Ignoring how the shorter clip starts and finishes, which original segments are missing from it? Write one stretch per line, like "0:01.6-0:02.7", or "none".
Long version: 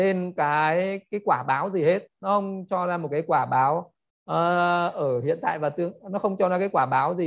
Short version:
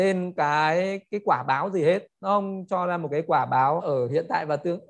0:03.8-0:04.9

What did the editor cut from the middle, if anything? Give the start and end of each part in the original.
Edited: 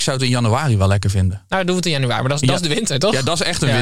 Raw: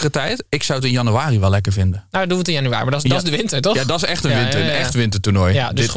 none

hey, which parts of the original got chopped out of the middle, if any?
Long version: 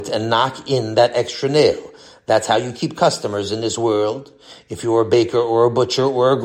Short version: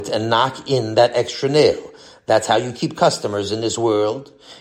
none

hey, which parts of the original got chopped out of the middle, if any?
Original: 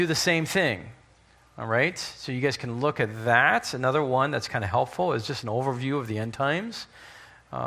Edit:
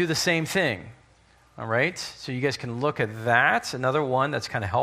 none

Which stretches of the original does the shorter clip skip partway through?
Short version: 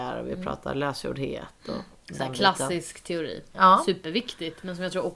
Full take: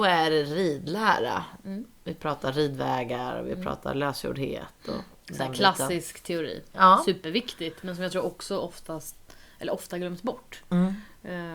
none

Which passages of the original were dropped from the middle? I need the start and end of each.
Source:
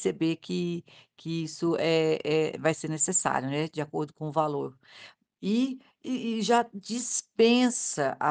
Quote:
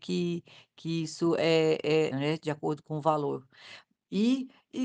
0:02.5-0:03.4

